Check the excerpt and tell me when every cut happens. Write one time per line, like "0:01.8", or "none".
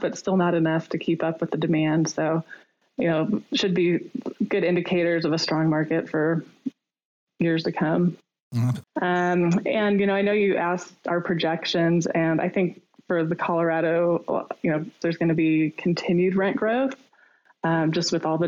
0:08.8
0:15.0